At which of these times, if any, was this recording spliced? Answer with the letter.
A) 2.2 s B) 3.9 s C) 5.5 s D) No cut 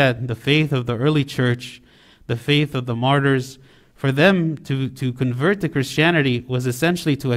D